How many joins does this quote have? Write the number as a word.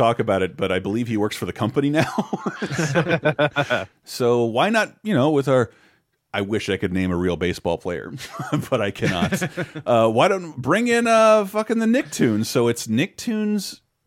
one